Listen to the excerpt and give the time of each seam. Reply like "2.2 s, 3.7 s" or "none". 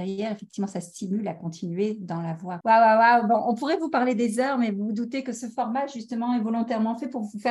2.6 s